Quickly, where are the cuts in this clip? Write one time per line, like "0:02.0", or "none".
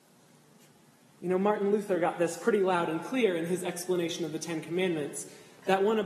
none